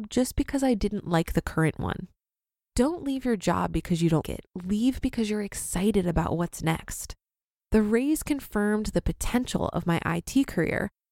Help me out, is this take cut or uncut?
cut